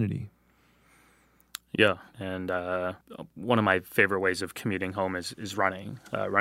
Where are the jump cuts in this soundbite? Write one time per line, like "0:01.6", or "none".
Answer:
0:02.1